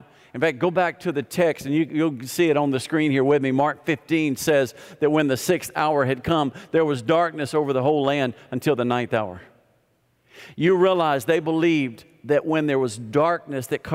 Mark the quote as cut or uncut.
uncut